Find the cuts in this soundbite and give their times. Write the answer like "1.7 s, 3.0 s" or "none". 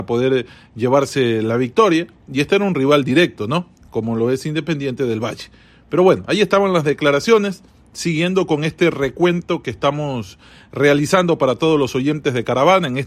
none